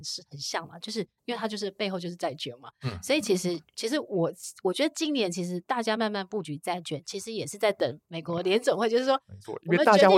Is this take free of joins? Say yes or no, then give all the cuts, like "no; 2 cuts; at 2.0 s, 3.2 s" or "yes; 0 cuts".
yes; 0 cuts